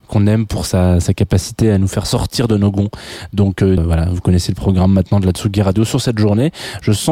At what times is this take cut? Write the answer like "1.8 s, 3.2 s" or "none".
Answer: 3.8 s